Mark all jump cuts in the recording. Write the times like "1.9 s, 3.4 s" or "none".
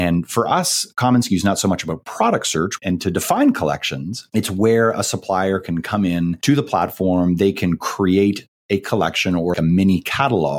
2.8 s, 9.5 s